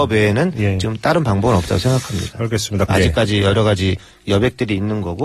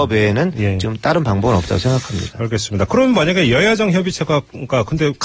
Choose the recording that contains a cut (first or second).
first